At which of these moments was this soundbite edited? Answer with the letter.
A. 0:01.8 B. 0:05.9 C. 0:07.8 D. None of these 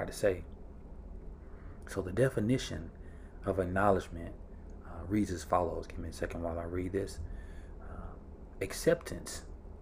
A